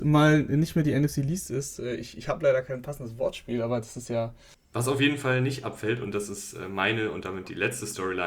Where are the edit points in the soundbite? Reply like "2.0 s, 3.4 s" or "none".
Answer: 4.5 s